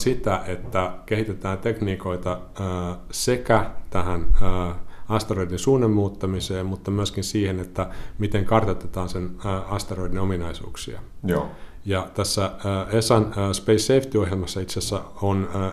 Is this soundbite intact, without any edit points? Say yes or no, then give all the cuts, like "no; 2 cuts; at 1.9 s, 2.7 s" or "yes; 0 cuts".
yes; 0 cuts